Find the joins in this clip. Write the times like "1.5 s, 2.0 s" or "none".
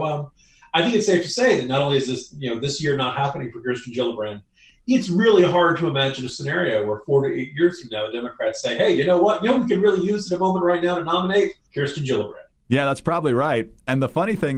none